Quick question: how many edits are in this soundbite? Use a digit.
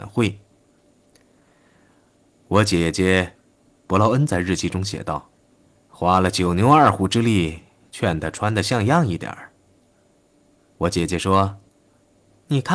0